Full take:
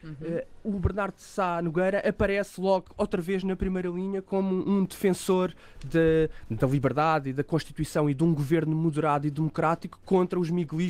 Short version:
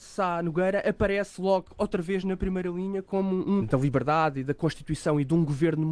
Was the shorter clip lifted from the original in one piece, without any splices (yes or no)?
no